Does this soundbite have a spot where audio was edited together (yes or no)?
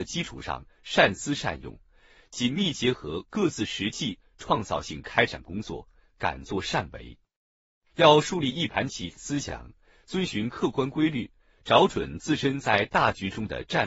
no